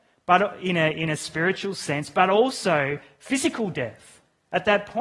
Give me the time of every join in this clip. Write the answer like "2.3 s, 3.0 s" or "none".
none